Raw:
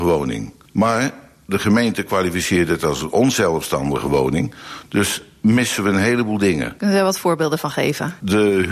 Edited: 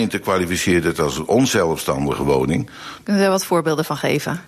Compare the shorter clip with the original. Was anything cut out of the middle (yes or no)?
yes